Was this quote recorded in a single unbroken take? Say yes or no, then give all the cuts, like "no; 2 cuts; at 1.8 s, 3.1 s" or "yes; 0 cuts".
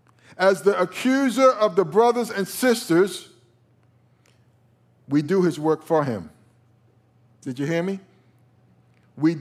yes; 0 cuts